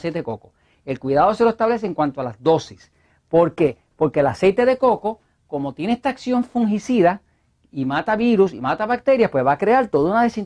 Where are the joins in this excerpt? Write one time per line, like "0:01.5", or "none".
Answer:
none